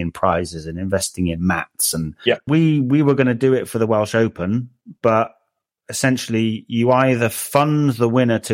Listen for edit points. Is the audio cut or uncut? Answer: cut